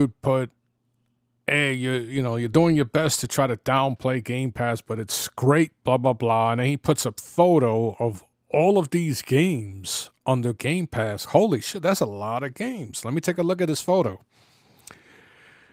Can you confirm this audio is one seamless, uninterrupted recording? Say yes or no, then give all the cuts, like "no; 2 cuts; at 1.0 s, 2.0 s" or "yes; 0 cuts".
no; 1 cut; at 11.2 s